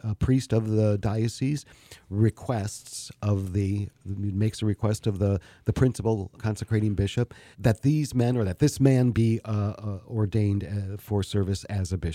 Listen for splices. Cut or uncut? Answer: cut